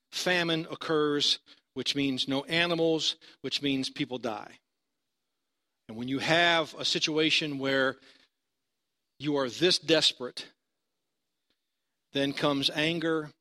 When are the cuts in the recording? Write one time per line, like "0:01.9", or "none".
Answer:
none

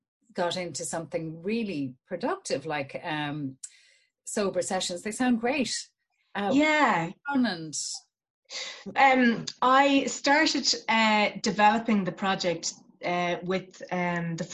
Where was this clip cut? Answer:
0:08.9

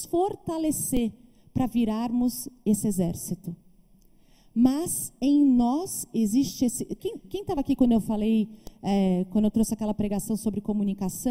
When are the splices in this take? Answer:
none

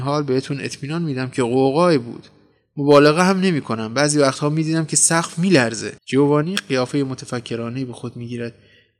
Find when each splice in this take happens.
0:06.0

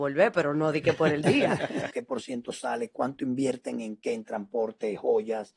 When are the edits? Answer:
0:01.9

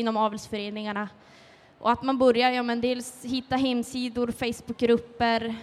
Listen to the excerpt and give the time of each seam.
none

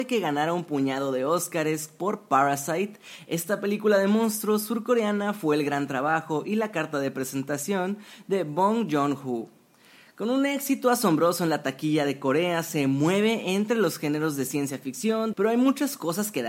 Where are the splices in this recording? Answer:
0:15.3

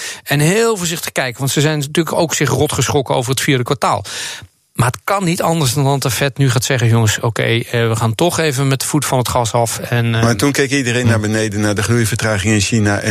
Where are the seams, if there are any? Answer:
none

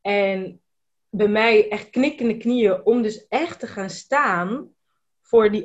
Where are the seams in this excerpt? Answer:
none

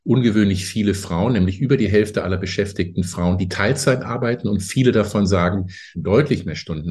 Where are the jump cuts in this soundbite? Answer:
0:05.9

